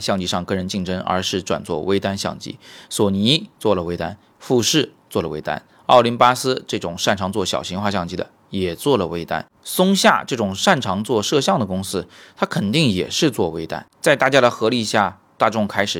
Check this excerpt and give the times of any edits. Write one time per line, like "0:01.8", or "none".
none